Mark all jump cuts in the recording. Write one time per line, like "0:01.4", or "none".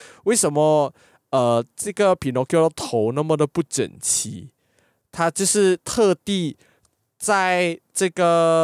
none